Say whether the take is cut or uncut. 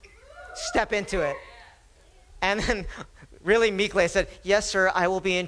uncut